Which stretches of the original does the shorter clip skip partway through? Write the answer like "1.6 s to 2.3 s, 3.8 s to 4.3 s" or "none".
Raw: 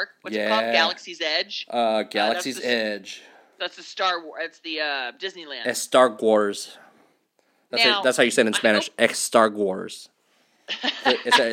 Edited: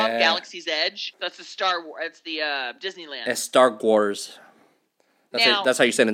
1.7 s to 3.5 s